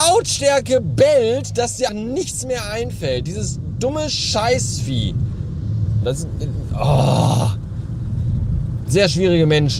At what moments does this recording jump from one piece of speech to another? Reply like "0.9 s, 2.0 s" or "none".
1.9 s, 6.0 s